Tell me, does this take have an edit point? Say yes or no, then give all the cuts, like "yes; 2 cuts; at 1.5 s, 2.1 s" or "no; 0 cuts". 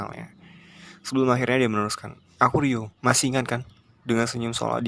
yes; 1 cut; at 3.0 s